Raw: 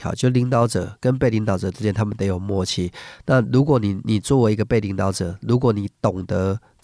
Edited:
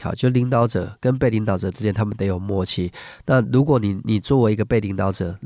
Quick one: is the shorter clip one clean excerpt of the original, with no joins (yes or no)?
yes